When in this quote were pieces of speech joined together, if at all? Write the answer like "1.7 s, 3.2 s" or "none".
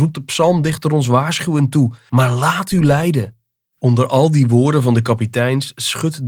2.1 s, 3.7 s